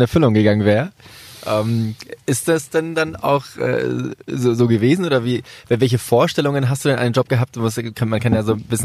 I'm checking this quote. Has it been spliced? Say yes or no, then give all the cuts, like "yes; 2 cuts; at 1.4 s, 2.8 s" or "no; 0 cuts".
no; 0 cuts